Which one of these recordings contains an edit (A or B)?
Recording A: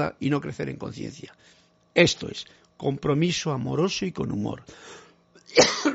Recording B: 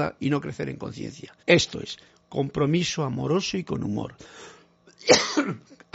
B